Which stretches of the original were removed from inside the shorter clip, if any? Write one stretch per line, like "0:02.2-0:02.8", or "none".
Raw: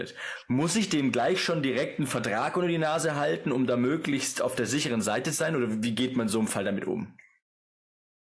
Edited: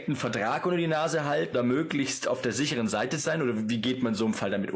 0:03.4-0:03.7

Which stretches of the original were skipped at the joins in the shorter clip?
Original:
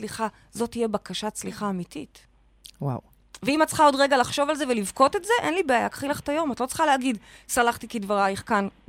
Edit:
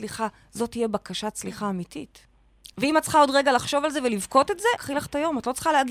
0:02.7-0:03.4
0:05.4-0:05.9

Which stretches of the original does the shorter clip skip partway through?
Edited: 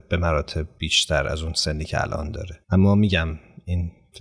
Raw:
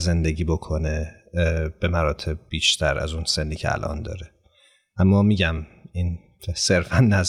0:04.3-0:04.9

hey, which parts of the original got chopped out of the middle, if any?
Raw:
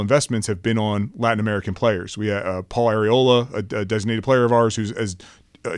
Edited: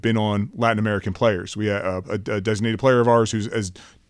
0:02.6-0:03.5

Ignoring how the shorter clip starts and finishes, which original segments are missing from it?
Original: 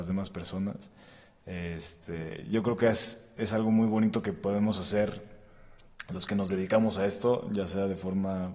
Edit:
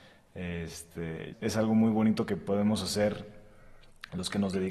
0:02.4-0:03.3

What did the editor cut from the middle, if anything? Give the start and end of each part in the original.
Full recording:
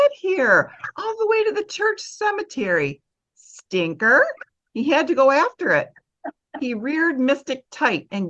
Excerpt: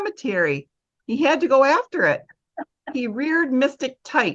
0:03.3-0:04.6

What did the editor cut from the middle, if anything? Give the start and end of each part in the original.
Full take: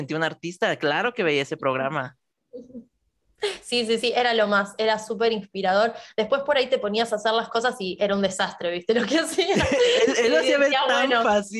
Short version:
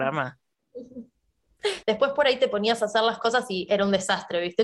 0:03.6-0:06.1

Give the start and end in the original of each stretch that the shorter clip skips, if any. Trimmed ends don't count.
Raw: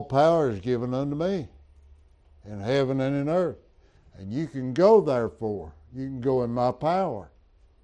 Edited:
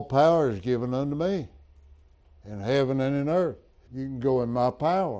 0:03.9-0:05.9

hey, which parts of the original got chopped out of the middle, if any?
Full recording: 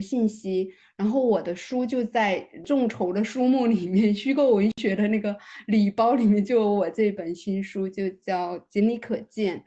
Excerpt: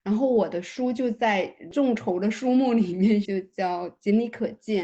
0:04.2-0:07.9

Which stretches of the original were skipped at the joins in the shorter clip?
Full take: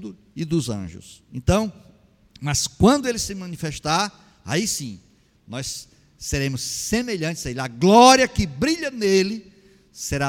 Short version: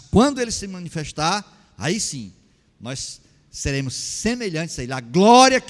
none

